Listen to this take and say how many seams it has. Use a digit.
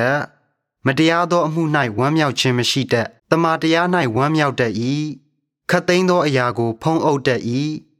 1